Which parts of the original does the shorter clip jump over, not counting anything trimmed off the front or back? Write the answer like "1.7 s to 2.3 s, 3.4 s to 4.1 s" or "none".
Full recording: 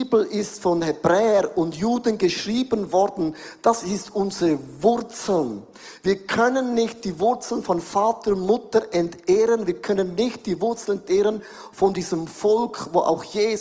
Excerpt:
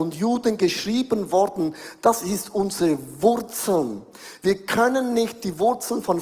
none